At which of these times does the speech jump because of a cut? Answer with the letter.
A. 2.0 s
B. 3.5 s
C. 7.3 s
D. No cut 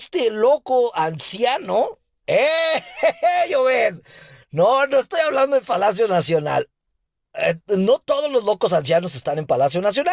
D